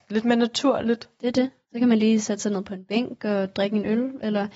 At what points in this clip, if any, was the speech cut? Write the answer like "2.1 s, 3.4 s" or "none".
none